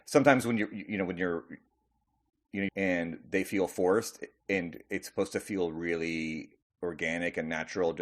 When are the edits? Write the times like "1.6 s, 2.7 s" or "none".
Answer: 2.7 s